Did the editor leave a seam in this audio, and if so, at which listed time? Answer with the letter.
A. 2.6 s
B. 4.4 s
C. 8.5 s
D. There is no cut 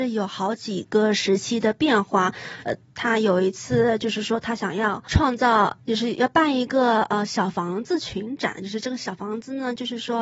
A